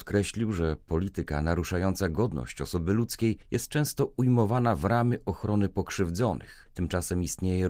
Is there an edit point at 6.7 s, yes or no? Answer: yes